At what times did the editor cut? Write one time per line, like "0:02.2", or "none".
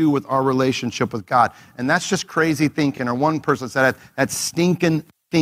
none